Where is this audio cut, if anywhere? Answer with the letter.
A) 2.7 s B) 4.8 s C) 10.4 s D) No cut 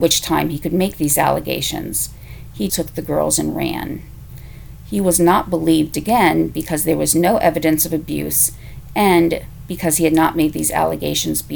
A